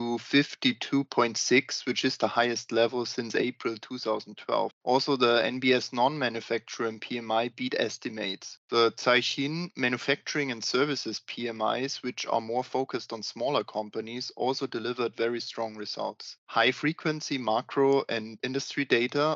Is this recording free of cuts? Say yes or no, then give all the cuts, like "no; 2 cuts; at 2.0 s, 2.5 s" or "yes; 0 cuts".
yes; 0 cuts